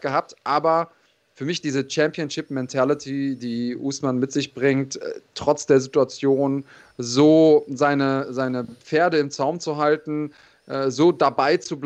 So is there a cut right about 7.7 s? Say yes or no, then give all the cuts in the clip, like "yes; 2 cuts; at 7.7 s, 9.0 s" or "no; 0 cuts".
no; 0 cuts